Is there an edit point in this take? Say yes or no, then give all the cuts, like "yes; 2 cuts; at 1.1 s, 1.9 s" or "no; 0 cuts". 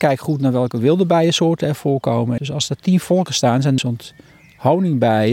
yes; 2 cuts; at 2.4 s, 3.8 s